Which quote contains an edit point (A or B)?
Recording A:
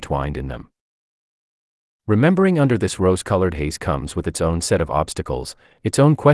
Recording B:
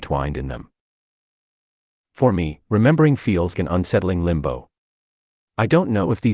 B